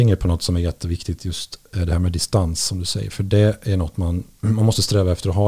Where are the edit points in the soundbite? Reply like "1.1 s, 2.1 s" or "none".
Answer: none